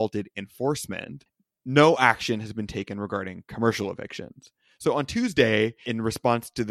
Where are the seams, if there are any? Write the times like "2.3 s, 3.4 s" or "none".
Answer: none